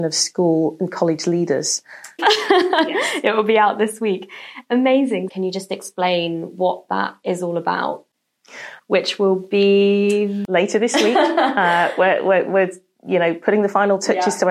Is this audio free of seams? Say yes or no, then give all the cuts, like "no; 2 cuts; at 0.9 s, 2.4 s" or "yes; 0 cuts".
no; 3 cuts; at 2.2 s, 5.3 s, 8.8 s